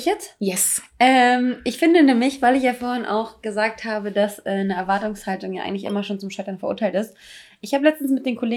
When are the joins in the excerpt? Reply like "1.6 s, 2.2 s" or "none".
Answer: none

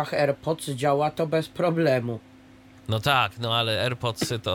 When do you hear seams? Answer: none

